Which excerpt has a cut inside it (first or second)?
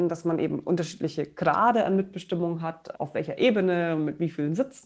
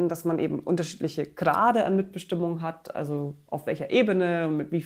first